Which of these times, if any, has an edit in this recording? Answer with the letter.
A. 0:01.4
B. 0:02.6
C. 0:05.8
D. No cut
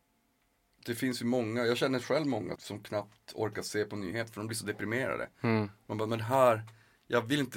B